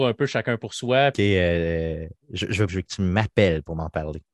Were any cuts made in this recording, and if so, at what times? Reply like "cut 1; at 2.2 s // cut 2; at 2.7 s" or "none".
cut 1; at 1.1 s // cut 2; at 2.7 s